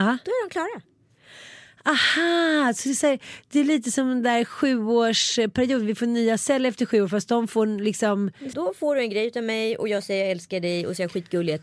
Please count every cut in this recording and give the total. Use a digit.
1